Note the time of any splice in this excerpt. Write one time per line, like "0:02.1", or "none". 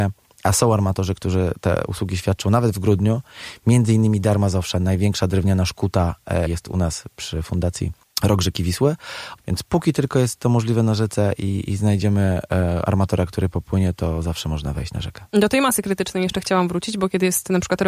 0:06.5
0:09.4